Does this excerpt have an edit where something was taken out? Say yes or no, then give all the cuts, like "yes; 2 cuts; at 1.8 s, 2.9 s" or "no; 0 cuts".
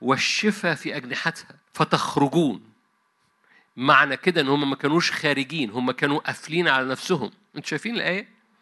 yes; 1 cut; at 1.6 s